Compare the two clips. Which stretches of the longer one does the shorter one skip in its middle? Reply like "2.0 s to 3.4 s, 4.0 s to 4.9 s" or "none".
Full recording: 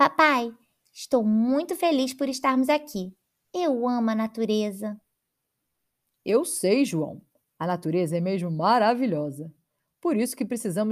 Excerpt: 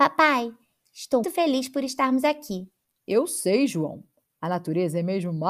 1.2 s to 1.7 s, 3.3 s to 6.0 s